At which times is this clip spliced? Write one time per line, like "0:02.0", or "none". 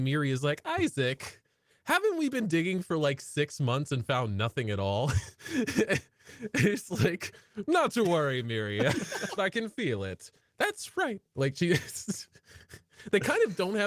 0:09.4